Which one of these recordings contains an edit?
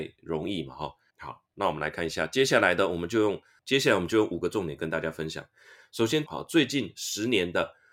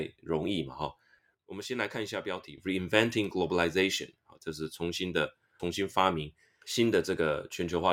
first; 2 cuts; at 1.1 s, 6.3 s

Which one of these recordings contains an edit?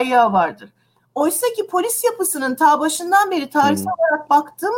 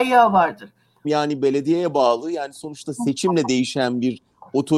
second; 1 cut; at 1.0 s

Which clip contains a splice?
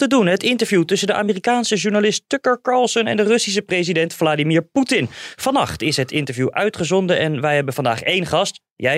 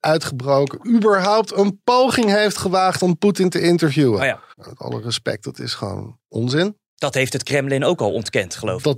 second; 1 cut; at 4.5 s

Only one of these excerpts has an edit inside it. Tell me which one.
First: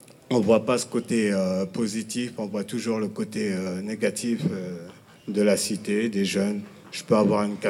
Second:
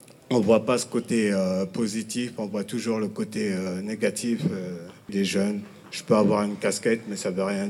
second; 1 cut; at 5.1 s

